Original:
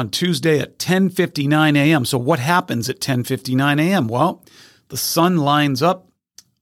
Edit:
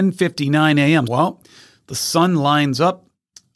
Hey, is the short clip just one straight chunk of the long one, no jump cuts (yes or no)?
no